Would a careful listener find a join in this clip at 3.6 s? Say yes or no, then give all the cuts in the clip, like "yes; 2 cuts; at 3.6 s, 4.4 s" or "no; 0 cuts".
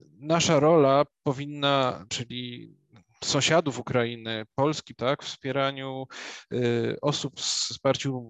no; 3 cuts; at 2.1 s, 5.0 s, 7.4 s